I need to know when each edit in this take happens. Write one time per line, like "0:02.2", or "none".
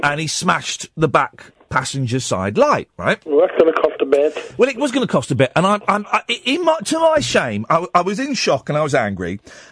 none